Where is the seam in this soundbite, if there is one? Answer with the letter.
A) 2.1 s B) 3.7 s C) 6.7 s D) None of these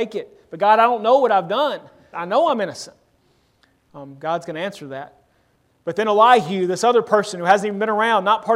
A